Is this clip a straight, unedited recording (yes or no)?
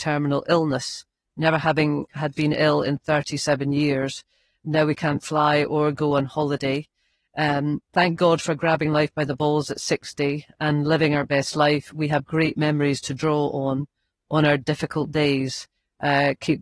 yes